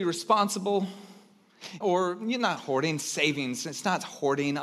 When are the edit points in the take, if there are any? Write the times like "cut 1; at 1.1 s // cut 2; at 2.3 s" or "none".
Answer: cut 1; at 1.8 s

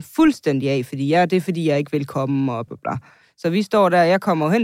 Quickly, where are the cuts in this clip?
cut 1; at 2.7 s

